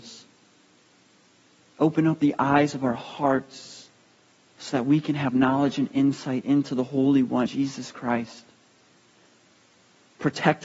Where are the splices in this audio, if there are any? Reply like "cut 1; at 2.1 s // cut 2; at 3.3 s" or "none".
cut 1; at 7.5 s